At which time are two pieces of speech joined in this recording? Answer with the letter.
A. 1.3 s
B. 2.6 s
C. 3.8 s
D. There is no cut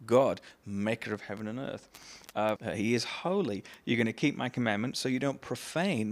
B